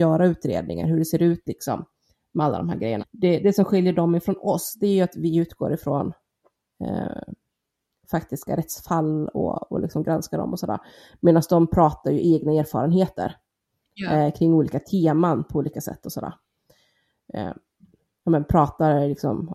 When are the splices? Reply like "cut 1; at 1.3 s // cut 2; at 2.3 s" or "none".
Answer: cut 1; at 3.0 s